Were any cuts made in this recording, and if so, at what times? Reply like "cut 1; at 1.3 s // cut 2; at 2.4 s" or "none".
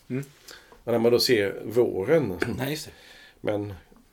cut 1; at 2.4 s